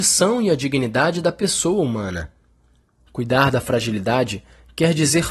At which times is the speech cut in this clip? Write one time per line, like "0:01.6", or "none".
0:03.0